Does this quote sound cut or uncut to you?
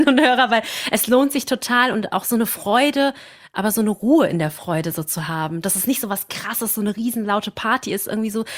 uncut